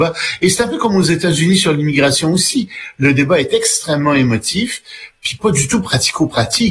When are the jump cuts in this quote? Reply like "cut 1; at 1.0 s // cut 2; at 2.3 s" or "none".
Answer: none